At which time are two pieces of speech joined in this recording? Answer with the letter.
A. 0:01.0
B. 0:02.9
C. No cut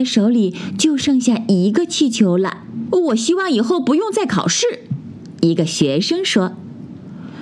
B